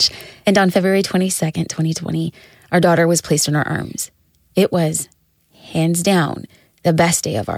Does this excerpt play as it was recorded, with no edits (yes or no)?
yes